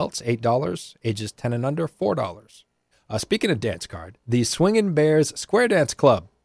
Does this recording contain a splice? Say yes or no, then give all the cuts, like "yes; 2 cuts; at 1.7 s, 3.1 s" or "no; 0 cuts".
yes; 1 cut; at 2.9 s